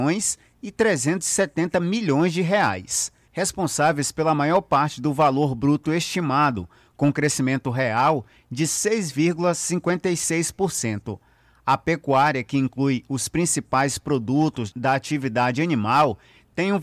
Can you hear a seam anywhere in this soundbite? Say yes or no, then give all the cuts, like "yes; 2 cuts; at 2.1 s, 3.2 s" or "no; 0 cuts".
no; 0 cuts